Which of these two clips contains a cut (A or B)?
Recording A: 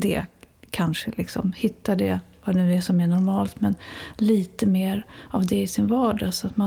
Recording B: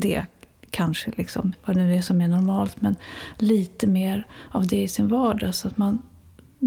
B